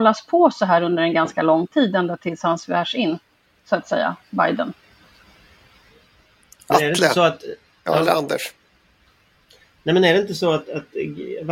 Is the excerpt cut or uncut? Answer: uncut